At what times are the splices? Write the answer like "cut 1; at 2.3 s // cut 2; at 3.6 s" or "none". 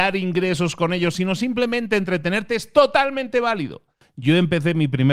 none